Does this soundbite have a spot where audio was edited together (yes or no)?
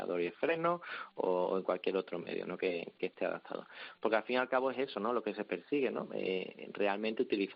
no